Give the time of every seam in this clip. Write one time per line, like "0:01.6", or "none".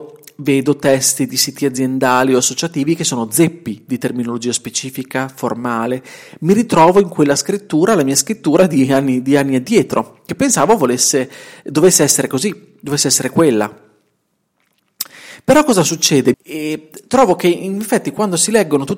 0:16.3